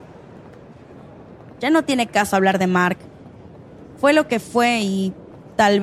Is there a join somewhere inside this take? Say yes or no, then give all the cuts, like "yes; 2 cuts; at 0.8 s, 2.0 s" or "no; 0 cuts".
no; 0 cuts